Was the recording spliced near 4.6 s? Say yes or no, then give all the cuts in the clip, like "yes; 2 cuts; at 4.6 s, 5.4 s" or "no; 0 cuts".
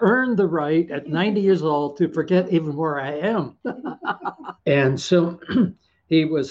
yes; 1 cut; at 4.6 s